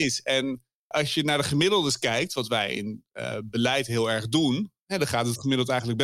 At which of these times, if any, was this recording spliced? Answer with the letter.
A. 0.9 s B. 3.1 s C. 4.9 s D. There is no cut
A